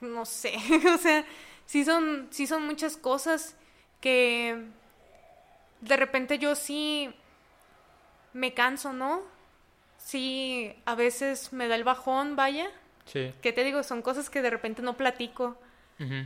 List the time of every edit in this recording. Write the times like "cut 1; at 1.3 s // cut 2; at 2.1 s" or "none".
none